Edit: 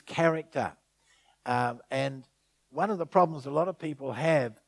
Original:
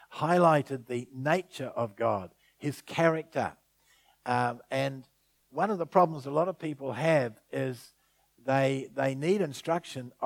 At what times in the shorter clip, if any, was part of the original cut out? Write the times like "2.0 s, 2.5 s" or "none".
none